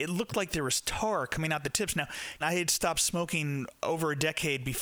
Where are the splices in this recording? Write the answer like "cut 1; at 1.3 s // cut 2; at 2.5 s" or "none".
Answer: cut 1; at 2.4 s